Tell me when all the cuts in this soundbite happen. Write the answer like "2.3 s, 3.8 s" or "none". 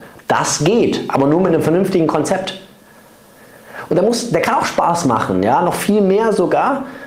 3.9 s